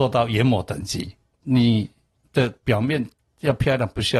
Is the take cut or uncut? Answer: cut